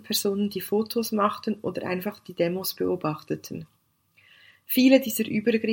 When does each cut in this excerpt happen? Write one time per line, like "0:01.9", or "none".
none